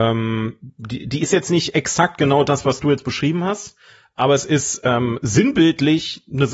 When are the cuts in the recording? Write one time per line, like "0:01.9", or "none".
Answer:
none